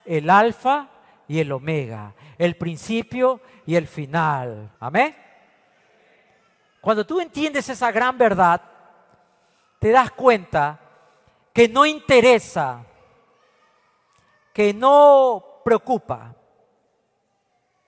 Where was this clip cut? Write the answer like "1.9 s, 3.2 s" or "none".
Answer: 4.7 s